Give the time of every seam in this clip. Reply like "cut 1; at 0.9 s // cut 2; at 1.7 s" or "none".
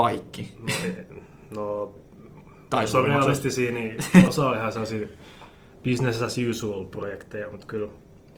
cut 1; at 4.3 s